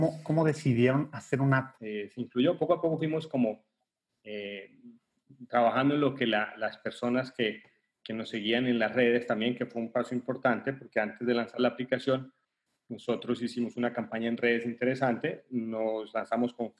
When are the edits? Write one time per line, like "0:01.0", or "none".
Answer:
0:01.8